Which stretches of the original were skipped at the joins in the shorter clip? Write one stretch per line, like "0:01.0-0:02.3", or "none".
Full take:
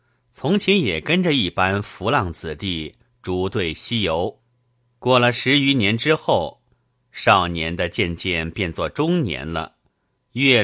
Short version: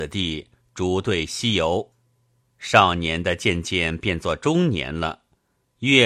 0:04.9-0:06.9